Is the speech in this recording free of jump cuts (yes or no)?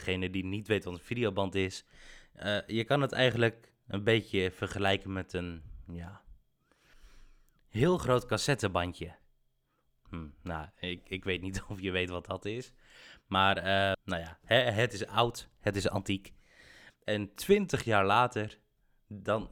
no